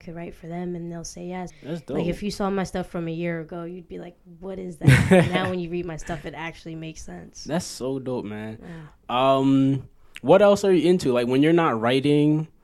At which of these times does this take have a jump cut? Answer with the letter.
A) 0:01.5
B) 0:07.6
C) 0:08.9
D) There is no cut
A